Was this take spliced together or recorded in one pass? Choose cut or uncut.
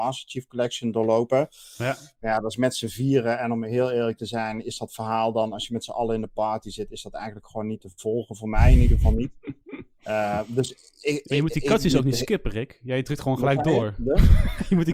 uncut